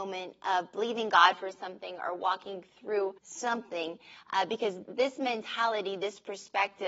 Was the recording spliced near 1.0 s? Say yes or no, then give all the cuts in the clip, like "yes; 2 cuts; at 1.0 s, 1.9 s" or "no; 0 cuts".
no; 2 cuts; at 3.2 s, 4.8 s